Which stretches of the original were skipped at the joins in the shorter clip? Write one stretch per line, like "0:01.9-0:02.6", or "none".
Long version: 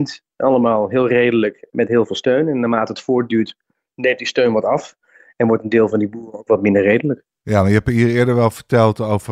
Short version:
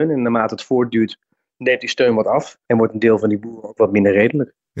0:05.0-0:05.3